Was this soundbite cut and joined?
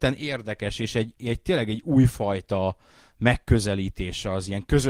no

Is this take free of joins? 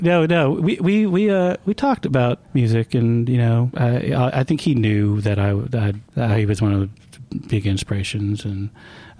yes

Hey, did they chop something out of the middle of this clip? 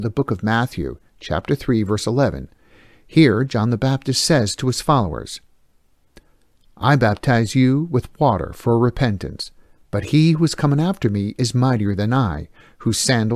no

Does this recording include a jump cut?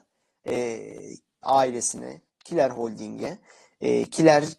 yes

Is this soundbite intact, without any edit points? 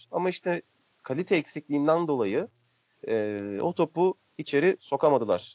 yes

